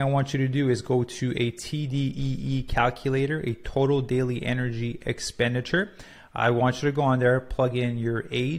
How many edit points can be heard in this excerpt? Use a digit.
0